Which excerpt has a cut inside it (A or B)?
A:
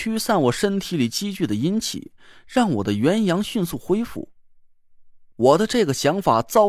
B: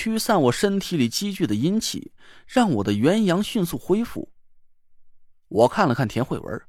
B